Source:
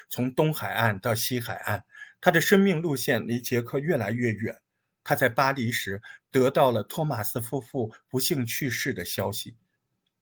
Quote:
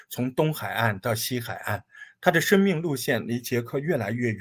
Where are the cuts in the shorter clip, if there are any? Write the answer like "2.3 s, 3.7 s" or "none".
none